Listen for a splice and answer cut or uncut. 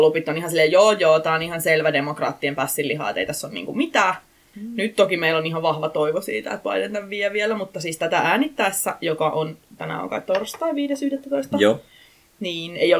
cut